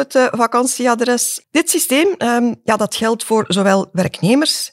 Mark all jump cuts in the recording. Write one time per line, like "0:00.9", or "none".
0:01.4